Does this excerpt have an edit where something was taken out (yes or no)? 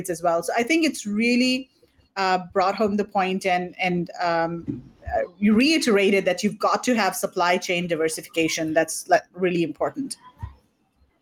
no